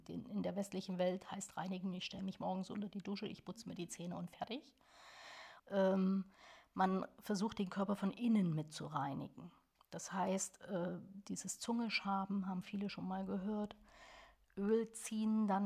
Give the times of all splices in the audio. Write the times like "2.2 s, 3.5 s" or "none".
5.6 s